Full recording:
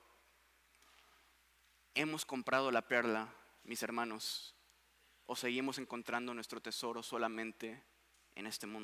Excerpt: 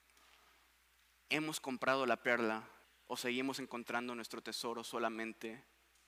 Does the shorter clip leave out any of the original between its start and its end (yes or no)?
yes